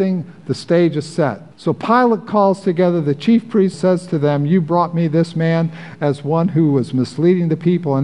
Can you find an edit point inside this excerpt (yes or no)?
yes